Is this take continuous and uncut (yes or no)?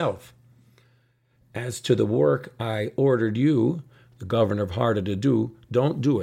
yes